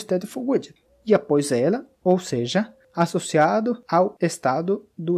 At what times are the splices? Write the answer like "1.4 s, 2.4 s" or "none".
1.9 s